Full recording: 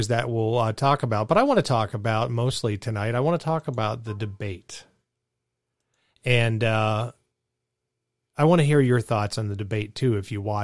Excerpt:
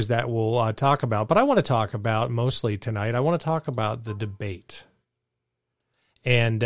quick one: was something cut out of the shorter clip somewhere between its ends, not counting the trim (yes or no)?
no